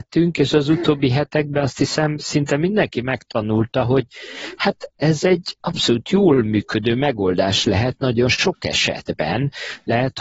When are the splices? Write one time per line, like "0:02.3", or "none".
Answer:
none